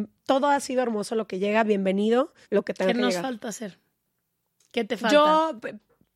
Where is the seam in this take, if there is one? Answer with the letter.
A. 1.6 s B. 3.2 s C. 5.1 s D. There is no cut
D